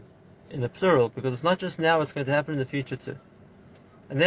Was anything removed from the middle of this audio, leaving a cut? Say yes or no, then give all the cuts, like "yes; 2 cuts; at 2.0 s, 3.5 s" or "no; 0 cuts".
no; 0 cuts